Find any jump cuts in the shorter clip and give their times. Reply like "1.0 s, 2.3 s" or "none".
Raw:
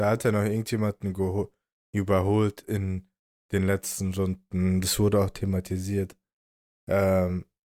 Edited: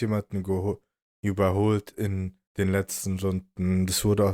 2.5 s